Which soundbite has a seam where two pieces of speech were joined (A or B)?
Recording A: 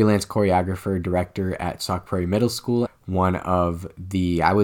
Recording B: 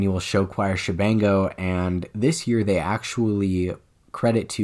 A